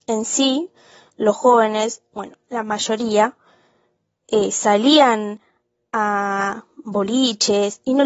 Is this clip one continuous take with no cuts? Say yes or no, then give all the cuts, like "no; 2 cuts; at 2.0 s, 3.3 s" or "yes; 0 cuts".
yes; 0 cuts